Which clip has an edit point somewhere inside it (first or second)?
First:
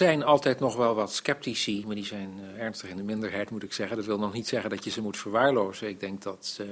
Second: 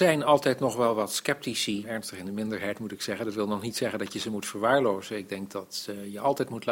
second